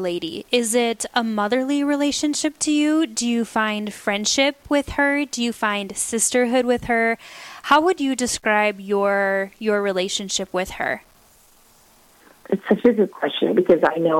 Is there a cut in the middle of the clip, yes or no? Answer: no